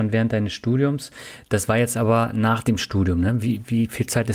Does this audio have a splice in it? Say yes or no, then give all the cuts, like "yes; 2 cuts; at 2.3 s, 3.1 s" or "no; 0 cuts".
no; 0 cuts